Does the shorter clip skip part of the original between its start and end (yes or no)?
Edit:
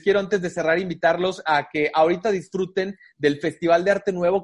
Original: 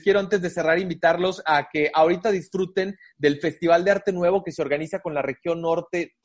no